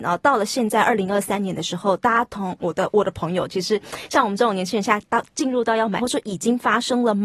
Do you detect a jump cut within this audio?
yes; 1 cut; at 6.0 s

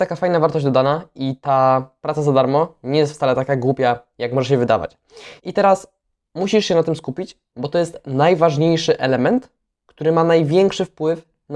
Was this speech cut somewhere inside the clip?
yes; 1 cut; at 5.4 s

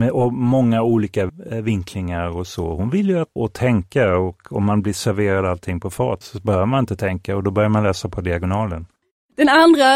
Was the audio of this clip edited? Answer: yes; 2 cuts; at 3.4 s, 6.2 s

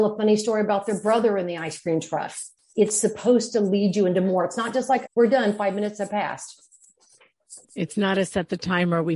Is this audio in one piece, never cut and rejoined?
no; 2 cuts; at 5.1 s, 7.6 s

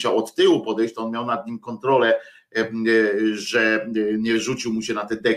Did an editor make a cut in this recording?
no; 0 cuts

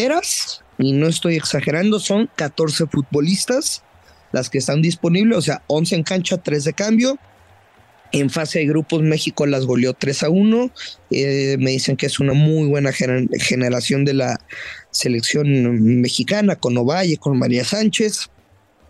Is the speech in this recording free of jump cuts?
yes; 0 cuts

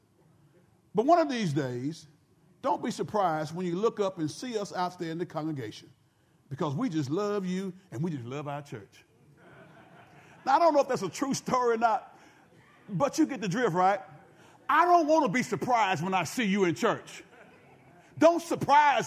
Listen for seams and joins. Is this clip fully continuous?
yes; 0 cuts

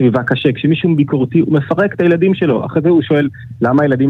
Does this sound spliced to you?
no; 0 cuts

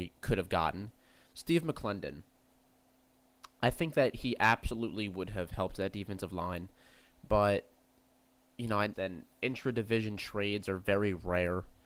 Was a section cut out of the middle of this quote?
yes; 1 cut; at 8.9 s

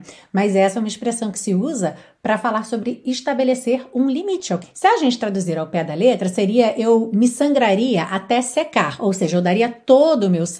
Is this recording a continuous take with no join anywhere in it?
no; 1 cut; at 4.6 s

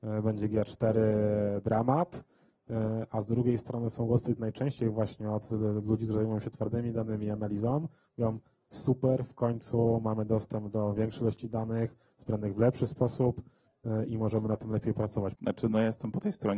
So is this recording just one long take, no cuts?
no; 1 cut; at 15.3 s

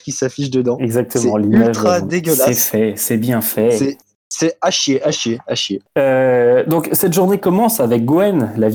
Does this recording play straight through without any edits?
yes; 0 cuts

